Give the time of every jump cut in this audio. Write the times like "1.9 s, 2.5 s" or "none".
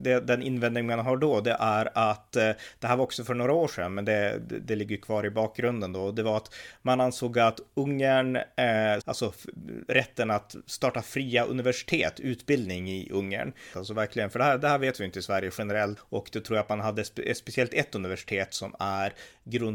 9.0 s, 13.7 s, 16.0 s